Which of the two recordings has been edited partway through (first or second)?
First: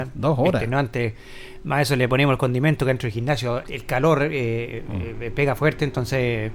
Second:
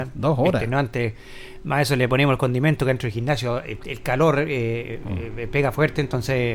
first